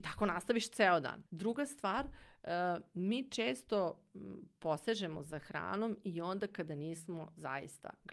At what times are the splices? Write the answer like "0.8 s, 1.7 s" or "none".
1.3 s